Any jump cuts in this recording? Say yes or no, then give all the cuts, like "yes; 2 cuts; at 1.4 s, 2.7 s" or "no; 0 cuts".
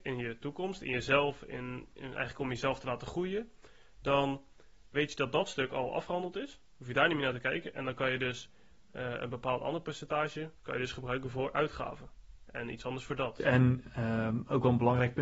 no; 0 cuts